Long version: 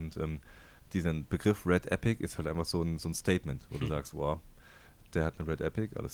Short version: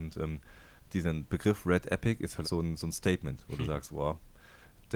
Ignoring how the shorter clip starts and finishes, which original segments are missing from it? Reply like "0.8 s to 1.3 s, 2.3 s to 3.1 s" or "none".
2.4 s to 2.7 s